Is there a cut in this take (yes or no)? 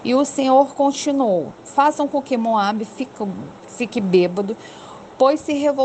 no